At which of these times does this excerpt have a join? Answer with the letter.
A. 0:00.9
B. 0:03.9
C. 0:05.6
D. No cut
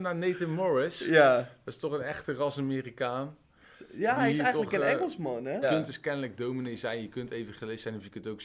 C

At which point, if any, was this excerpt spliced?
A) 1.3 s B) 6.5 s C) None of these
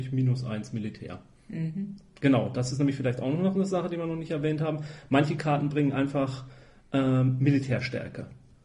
C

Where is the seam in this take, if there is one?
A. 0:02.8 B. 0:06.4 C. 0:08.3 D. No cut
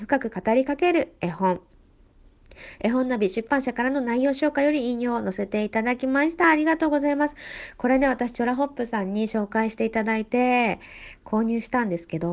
D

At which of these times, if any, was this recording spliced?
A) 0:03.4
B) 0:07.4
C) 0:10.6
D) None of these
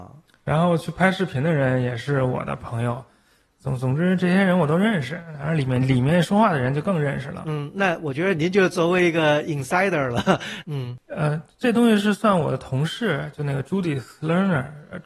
C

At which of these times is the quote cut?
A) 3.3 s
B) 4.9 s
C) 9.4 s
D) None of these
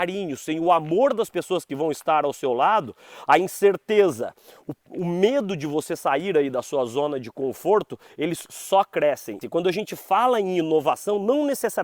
C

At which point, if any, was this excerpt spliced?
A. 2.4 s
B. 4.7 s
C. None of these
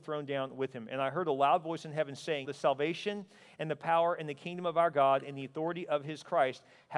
A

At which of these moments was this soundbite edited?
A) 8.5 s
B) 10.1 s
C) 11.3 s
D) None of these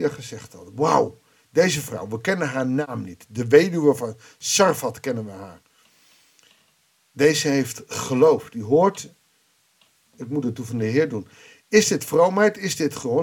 D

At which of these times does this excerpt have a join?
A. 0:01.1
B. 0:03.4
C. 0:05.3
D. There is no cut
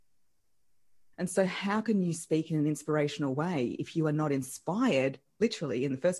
A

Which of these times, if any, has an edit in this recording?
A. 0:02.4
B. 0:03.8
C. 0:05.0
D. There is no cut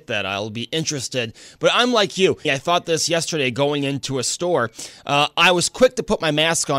A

